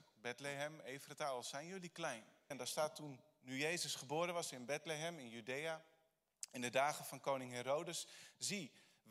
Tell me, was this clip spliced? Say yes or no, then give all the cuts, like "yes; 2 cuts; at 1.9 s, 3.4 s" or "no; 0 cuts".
yes; 1 cut; at 2.5 s